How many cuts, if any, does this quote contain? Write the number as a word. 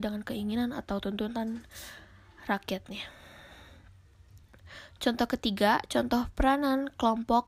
zero